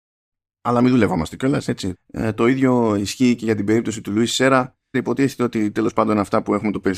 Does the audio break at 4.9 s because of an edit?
yes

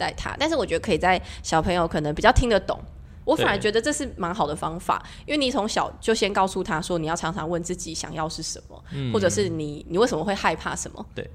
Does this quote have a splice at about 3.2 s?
yes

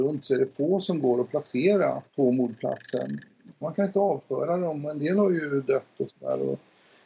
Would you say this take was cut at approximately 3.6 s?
yes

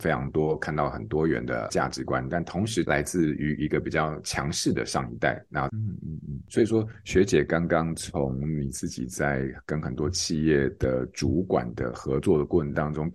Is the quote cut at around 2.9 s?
yes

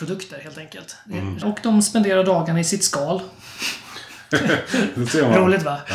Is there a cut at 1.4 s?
yes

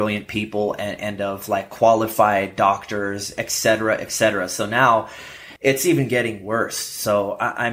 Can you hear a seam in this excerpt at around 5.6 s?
yes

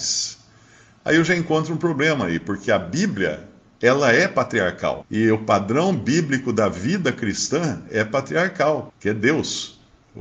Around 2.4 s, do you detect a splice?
no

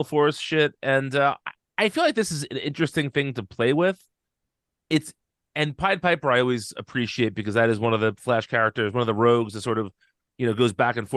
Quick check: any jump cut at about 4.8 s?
no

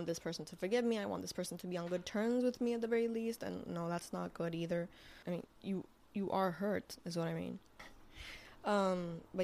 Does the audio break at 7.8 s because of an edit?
yes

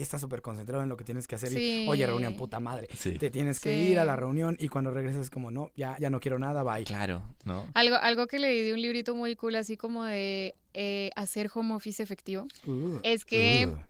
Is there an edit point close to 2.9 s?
no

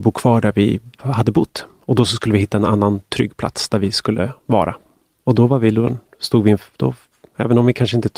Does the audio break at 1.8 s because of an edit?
no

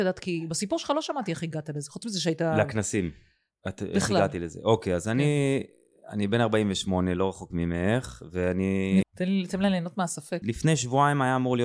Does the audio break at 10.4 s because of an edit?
yes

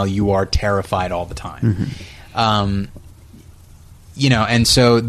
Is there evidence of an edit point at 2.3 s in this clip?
no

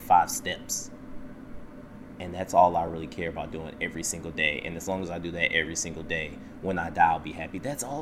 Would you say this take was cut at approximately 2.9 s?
no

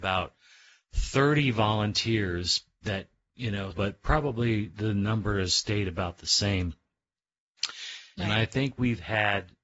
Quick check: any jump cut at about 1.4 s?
no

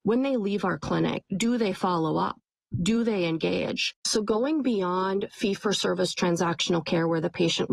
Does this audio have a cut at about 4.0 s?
yes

